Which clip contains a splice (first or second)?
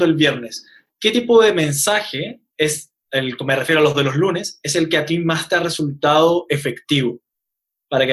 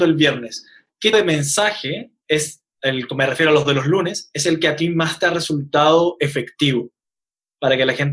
second